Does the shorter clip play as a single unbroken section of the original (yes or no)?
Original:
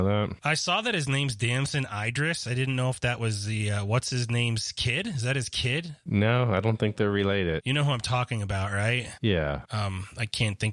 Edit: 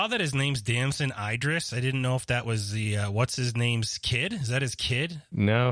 yes